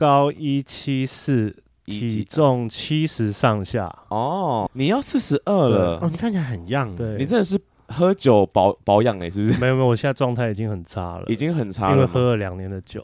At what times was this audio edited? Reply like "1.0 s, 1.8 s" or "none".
4.7 s